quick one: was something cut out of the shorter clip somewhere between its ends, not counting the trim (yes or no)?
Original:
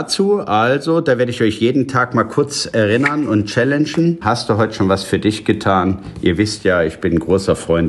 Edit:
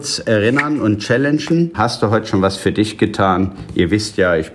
no